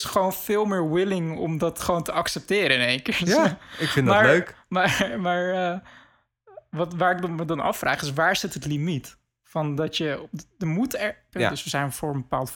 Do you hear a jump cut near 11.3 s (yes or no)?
yes